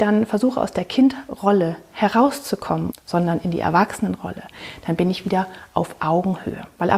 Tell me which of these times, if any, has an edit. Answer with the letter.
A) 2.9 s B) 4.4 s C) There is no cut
A